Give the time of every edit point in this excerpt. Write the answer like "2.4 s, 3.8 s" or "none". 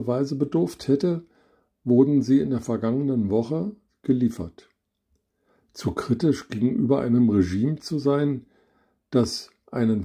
5.6 s